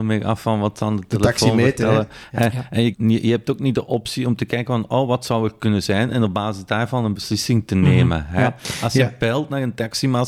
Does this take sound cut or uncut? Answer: cut